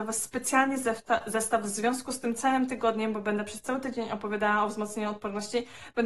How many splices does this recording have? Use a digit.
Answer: 0